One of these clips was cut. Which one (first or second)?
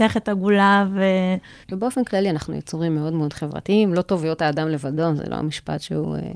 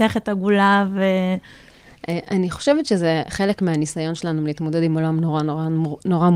first